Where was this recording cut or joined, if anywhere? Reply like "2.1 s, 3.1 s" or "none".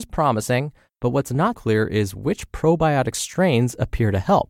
1.5 s